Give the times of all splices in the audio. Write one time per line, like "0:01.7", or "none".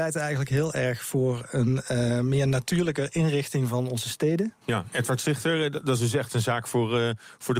0:04.6